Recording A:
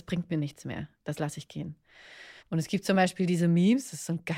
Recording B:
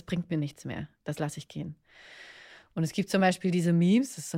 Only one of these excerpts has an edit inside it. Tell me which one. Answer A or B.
A